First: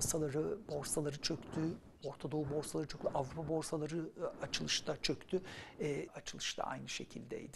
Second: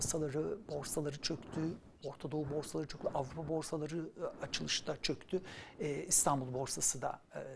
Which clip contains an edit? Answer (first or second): first